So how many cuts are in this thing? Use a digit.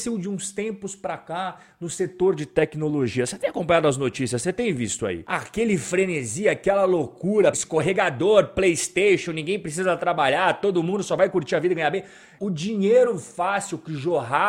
2